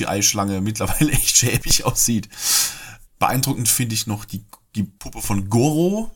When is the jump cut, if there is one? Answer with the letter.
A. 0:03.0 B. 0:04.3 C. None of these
A